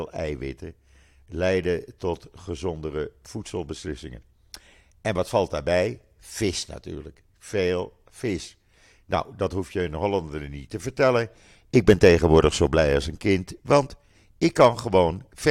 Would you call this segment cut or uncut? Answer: uncut